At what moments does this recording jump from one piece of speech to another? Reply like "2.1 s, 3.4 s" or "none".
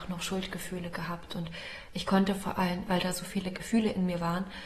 2.9 s